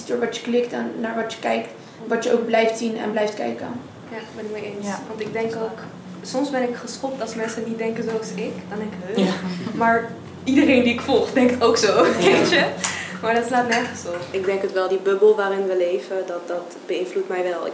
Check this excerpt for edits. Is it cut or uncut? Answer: uncut